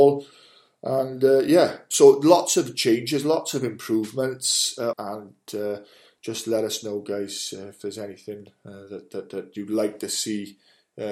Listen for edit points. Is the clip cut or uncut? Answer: cut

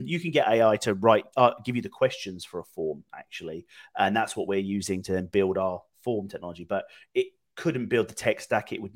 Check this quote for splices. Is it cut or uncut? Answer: uncut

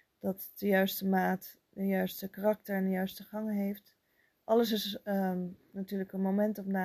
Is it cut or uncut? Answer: uncut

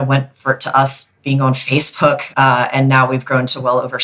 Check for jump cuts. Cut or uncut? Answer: cut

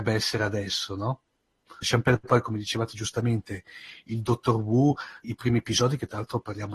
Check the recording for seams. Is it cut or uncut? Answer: cut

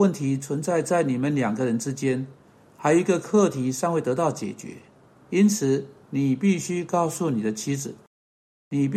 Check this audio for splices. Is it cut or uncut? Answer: uncut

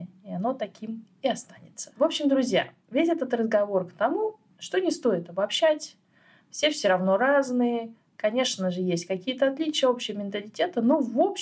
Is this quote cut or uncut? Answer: cut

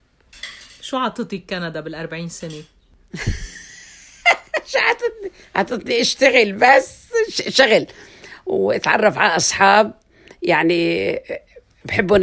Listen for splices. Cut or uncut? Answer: uncut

